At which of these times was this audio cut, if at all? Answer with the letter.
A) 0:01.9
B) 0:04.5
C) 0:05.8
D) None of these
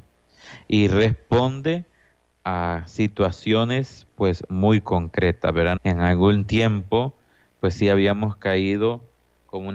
C